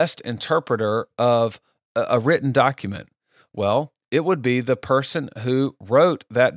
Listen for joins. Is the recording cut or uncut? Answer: uncut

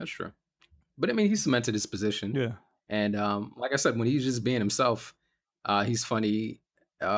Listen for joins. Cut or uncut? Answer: uncut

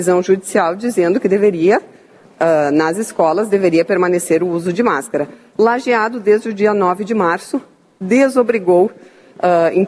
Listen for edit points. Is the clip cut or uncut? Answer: uncut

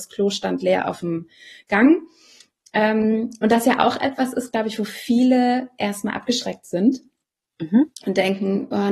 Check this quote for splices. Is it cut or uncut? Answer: uncut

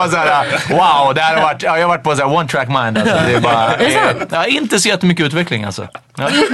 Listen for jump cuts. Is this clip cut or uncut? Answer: uncut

